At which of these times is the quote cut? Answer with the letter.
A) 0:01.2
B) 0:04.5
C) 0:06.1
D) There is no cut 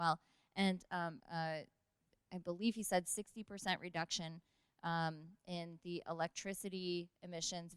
A